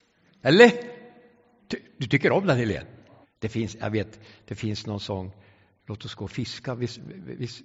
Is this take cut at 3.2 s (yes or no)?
yes